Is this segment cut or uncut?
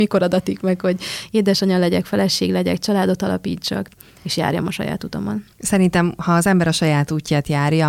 cut